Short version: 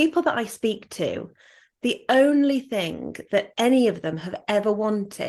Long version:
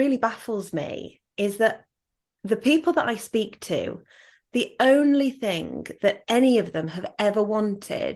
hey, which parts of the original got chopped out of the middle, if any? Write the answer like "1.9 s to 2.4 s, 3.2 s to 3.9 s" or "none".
none